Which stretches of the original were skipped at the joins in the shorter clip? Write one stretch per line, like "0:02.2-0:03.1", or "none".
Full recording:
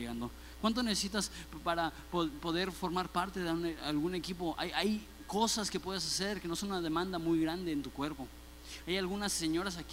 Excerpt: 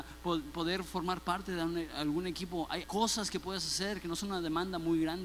0:04.7-0:05.2